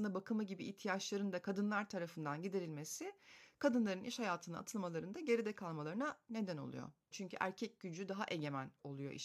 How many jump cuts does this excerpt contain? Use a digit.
1